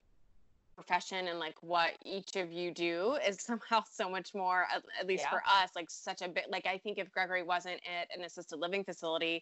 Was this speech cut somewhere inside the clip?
yes; 1 cut; at 3.4 s

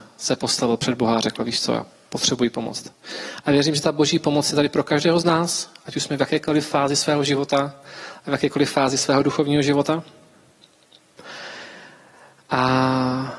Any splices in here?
no; 0 cuts

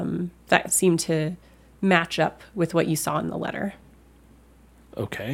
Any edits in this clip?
no; 0 cuts

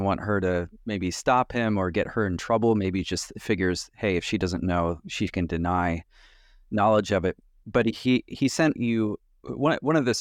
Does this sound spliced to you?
yes; 1 cut; at 8.8 s

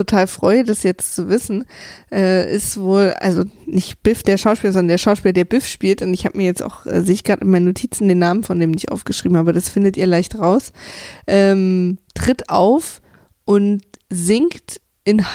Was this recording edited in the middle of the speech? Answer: no; 0 cuts

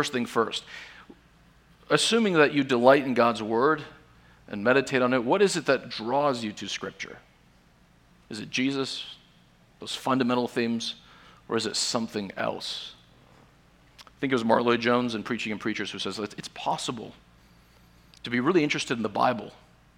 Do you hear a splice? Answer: no; 0 cuts

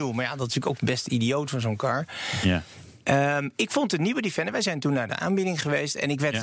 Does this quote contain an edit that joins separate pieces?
no; 0 cuts

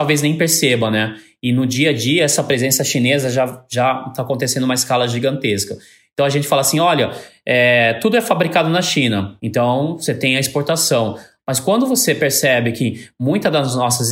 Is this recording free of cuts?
no; 2 cuts; at 9.4 s, 11.4 s

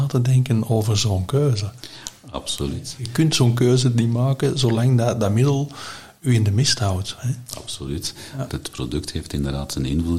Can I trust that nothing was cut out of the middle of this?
no; 2 cuts; at 7.2 s, 8.5 s

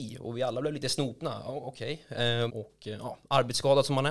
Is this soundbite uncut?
no; 1 cut; at 2.5 s

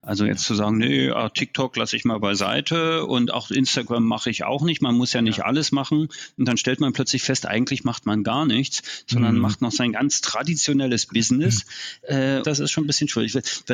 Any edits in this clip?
yes; 1 cut; at 12.4 s

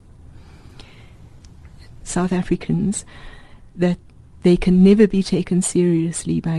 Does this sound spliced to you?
yes; 1 cut; at 2.0 s

